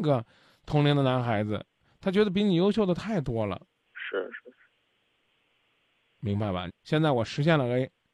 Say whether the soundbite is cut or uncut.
cut